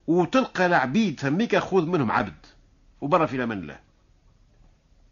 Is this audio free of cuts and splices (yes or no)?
yes